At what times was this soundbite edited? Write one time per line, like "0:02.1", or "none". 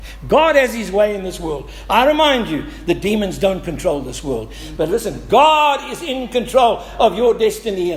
0:04.8